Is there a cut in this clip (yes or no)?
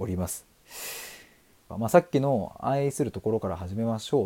yes